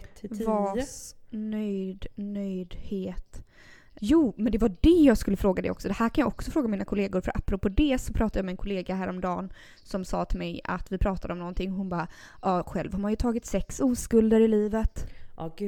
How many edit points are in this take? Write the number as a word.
one